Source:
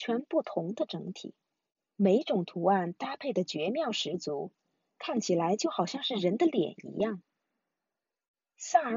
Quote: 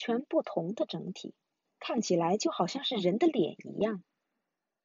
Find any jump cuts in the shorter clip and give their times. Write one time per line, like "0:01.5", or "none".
0:01.7